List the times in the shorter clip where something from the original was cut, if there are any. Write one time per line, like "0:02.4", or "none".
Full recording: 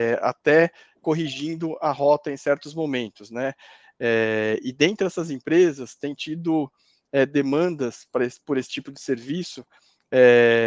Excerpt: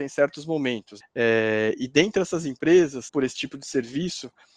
0:01.0
0:03.1